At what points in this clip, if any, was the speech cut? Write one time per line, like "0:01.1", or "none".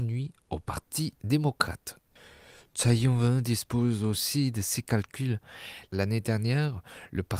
none